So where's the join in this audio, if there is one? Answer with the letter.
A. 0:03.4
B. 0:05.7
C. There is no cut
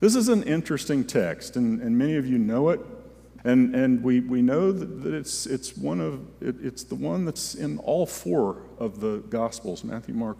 A